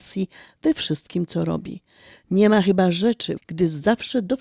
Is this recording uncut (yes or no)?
no